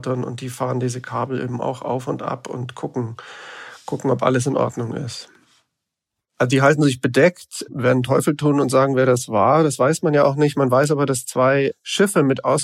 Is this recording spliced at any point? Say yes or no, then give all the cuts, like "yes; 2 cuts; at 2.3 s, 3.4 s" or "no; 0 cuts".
yes; 1 cut; at 6.2 s